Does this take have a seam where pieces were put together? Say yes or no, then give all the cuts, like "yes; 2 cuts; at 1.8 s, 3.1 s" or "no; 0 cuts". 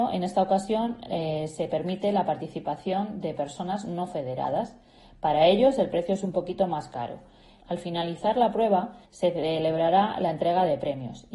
yes; 2 cuts; at 7.6 s, 9.0 s